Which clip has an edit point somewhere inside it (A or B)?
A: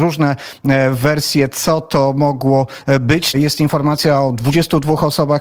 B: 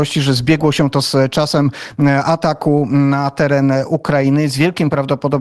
A